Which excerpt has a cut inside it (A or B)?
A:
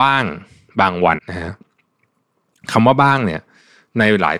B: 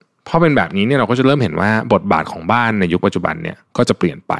A